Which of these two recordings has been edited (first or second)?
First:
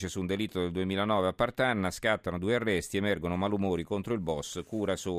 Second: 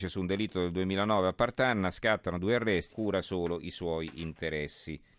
second